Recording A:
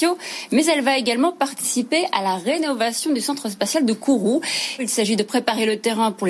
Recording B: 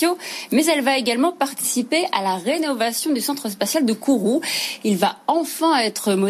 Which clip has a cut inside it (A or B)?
A